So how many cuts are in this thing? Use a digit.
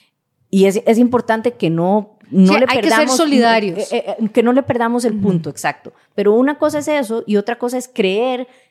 0